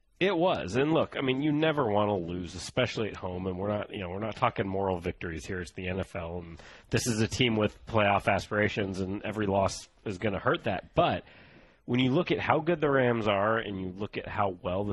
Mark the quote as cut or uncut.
uncut